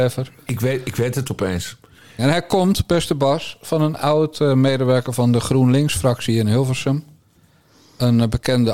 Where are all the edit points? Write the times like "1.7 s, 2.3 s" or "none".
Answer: 2.2 s